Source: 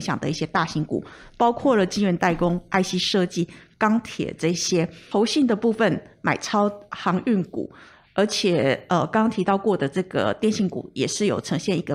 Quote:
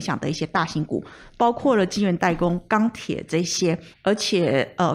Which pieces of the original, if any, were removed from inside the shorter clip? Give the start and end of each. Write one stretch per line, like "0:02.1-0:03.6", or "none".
0:02.7-0:03.8
0:05.0-0:08.0